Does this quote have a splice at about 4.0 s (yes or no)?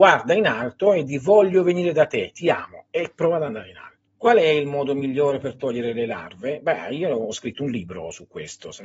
yes